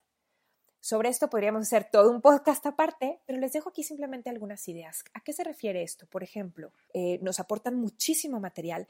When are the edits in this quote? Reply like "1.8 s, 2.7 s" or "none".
6.9 s